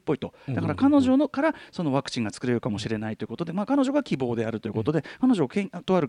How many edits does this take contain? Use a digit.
0